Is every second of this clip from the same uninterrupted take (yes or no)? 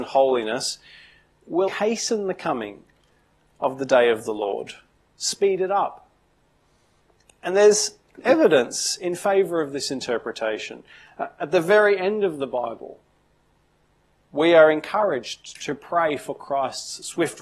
no